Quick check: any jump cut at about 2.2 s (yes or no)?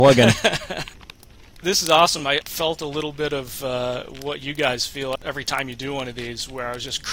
no